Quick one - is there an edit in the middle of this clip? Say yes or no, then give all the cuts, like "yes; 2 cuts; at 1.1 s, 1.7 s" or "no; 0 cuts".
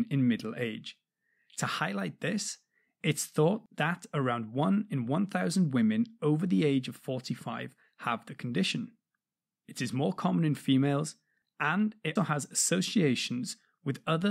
yes; 2 cuts; at 9.6 s, 12.2 s